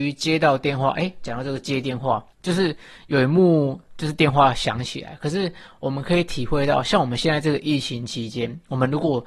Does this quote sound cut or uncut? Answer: cut